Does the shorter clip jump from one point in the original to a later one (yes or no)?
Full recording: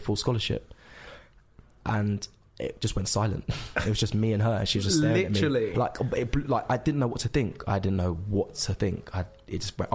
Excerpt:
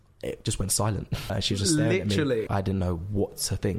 yes